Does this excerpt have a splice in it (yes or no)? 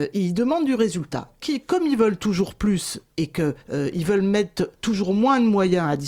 yes